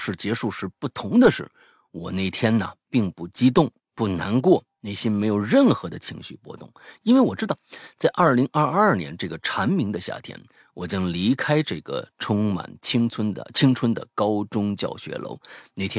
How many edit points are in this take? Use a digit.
1